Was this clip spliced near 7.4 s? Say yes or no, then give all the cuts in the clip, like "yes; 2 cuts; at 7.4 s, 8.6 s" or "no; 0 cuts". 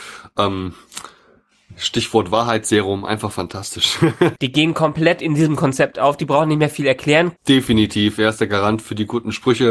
yes; 2 cuts; at 4.4 s, 7.4 s